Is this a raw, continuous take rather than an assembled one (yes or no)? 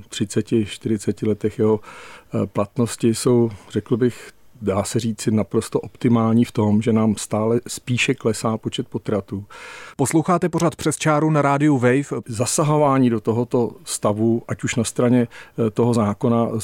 no